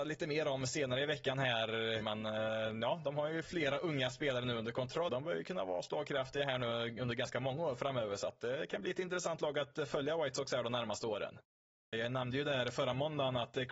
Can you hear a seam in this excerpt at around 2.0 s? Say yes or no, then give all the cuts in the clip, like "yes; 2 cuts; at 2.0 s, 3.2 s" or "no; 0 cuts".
yes; 3 cuts; at 2.0 s, 5.1 s, 11.9 s